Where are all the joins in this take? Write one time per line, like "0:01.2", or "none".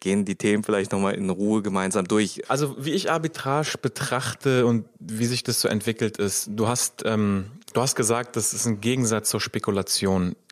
0:02.4